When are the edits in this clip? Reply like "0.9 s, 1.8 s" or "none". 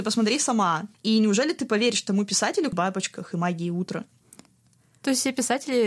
0.9 s, 2.7 s

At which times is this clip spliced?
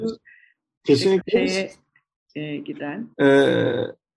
1.2 s, 3.1 s

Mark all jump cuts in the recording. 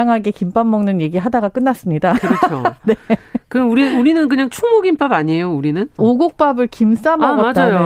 6.0 s

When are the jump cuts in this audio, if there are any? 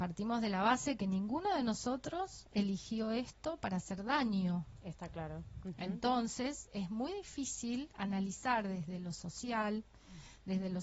none

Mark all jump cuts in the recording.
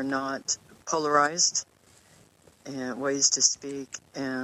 none

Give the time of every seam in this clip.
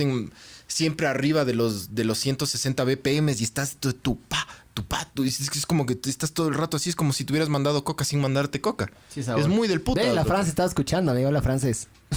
none

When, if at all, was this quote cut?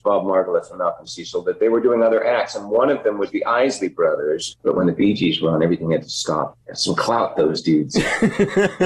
4.5 s, 6.6 s

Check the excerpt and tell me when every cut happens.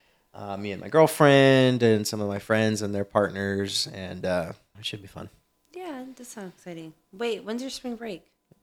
4.7 s

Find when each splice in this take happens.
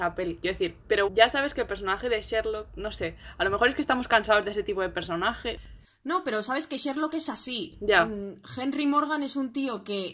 1.1 s

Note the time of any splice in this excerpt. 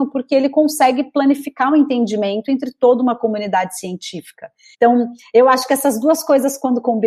4.7 s

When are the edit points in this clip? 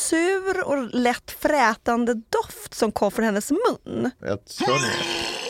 4.2 s

